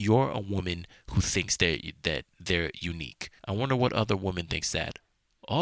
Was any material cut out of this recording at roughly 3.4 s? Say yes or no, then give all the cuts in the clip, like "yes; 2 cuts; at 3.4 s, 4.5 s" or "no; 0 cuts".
yes; 1 cut; at 3.4 s